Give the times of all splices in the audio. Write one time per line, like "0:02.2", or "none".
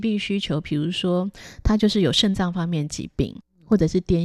none